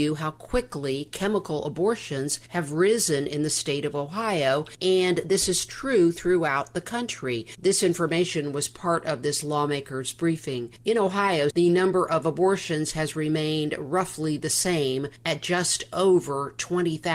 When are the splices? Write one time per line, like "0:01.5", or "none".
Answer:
0:11.5